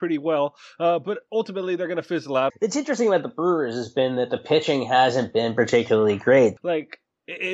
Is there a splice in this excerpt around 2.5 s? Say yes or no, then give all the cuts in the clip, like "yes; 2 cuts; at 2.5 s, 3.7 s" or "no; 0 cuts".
yes; 2 cuts; at 2.5 s, 6.6 s